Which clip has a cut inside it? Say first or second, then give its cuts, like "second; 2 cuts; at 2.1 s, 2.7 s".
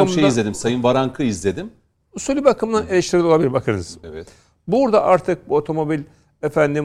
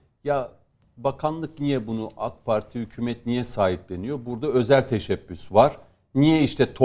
first; 2 cuts; at 1.9 s, 4.0 s